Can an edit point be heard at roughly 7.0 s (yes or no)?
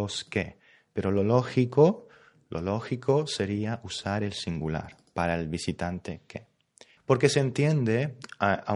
yes